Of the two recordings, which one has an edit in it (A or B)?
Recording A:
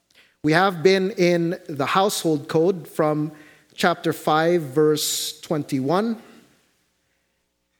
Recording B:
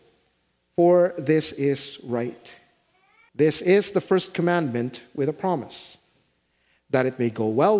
B